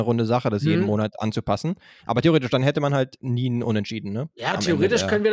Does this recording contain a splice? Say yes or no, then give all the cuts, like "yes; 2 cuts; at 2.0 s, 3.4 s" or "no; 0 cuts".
no; 0 cuts